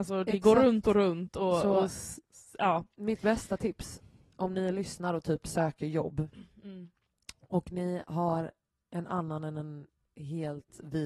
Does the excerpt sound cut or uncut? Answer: uncut